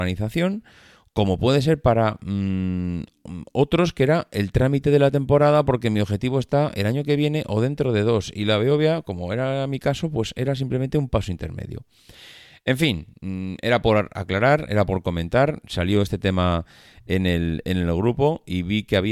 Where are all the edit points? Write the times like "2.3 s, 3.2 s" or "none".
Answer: none